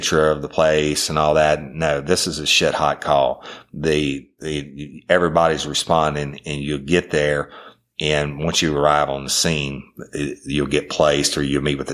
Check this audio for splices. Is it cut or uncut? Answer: uncut